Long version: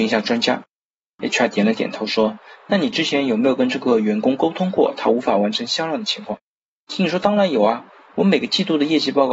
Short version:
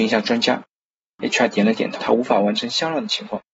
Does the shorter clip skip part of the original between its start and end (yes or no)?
yes